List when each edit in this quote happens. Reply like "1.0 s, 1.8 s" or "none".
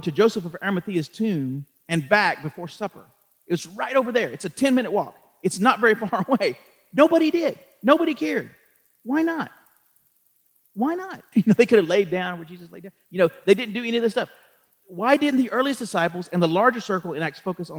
11.3 s